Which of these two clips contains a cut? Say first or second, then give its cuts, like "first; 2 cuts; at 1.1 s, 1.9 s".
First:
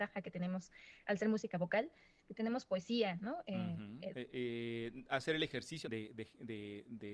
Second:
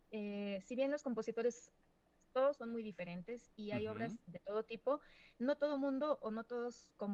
first; 2 cuts; at 4.1 s, 5.8 s